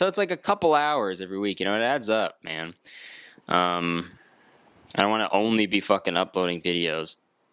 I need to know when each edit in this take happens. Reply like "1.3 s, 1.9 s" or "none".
none